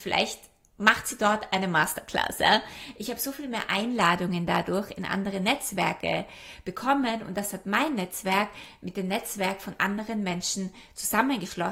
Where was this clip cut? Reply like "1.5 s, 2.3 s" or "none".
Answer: none